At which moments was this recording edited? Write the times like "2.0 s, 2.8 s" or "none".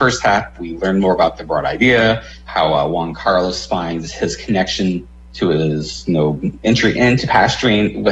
none